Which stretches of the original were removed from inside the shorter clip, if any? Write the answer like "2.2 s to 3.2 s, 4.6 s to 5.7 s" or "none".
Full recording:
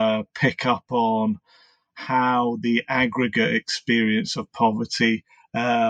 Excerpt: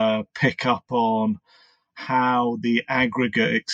none

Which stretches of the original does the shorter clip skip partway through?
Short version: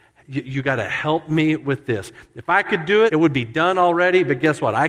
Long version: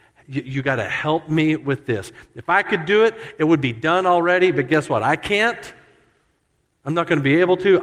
3.1 s to 3.3 s

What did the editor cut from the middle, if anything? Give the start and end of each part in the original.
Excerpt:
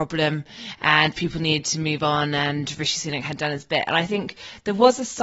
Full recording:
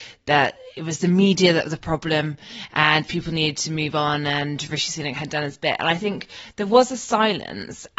none

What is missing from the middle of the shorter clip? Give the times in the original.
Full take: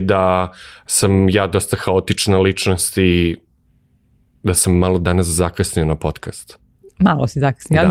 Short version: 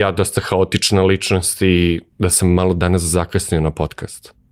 3.5 s to 4.3 s

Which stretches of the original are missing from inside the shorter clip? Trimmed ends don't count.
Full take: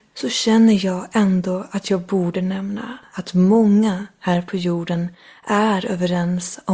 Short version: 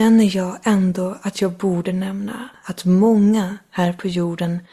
none

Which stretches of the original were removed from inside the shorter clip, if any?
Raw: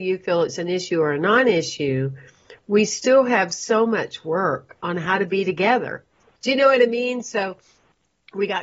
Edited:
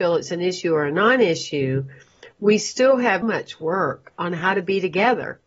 3.5 s to 3.9 s

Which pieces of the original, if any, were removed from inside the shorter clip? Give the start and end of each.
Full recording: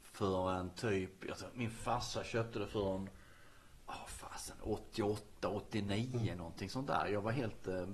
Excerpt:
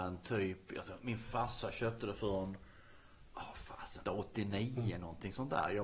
4.6 s to 5.4 s

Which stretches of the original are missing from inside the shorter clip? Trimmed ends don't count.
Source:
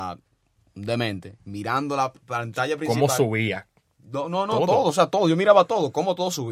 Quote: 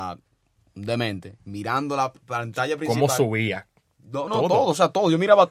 4.3 s to 4.5 s

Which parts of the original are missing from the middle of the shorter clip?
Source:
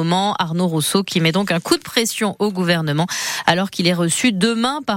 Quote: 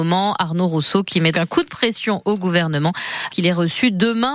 1.3 s to 1.5 s, 3.4 s to 3.7 s

